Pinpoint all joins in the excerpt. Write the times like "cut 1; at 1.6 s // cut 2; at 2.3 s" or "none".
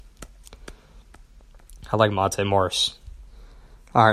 none